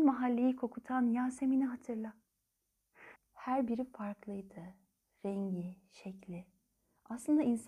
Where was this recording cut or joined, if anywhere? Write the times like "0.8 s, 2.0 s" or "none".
3.2 s